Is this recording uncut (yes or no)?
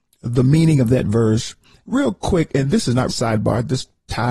no